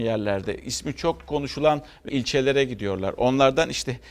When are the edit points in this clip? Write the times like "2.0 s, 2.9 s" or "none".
2.1 s